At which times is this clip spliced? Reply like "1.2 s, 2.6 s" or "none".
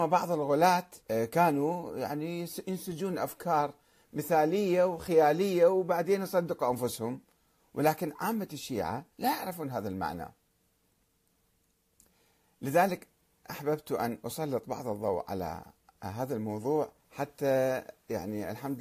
1.0 s, 9.1 s, 17.0 s